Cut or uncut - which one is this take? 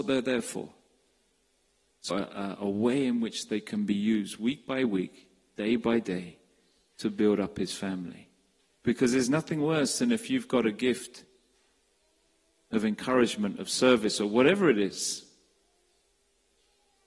cut